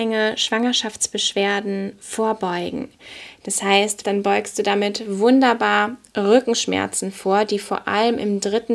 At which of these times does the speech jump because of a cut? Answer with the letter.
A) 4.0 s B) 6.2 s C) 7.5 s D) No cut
A